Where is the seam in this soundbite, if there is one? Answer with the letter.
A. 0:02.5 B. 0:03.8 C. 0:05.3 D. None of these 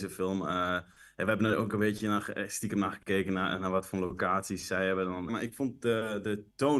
C